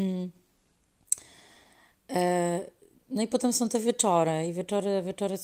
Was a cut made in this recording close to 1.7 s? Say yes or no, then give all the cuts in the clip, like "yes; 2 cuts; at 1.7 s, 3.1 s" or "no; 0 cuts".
no; 0 cuts